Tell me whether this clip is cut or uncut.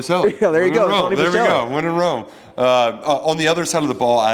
uncut